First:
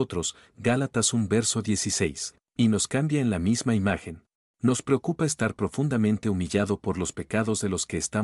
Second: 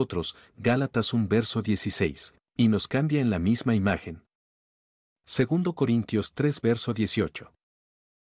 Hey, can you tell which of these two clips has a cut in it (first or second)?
first